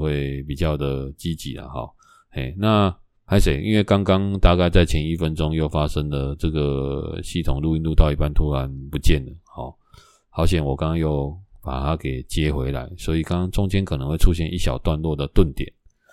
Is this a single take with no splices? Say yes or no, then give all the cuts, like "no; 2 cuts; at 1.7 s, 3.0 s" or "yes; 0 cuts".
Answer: yes; 0 cuts